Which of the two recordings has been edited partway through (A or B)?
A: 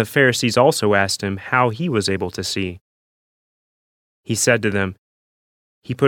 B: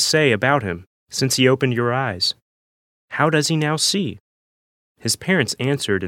B